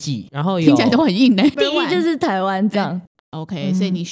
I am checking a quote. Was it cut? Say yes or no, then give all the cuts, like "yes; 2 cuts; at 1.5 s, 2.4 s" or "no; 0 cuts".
yes; 2 cuts; at 1.6 s, 3.1 s